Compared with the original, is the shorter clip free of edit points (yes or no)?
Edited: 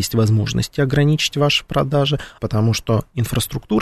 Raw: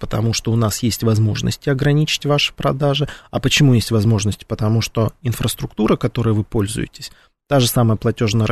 no